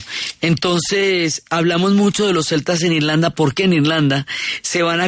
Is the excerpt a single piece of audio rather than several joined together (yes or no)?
yes